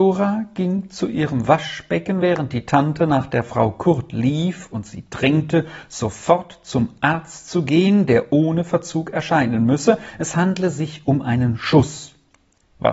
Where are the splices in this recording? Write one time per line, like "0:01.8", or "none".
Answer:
none

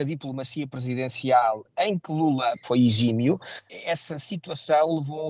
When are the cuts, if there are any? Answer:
0:02.6

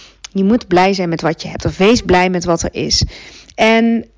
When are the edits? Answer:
none

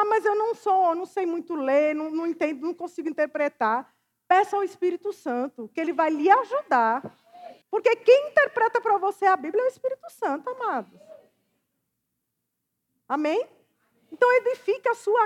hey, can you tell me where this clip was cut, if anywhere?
0:07.6

